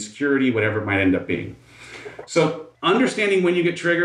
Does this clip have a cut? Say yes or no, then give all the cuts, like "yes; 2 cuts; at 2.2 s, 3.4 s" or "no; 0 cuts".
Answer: no; 0 cuts